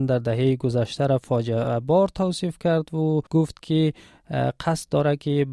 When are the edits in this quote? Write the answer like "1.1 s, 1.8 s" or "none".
3.3 s